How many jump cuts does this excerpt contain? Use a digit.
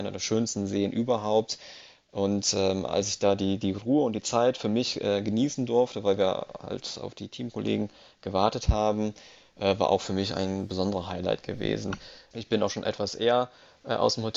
1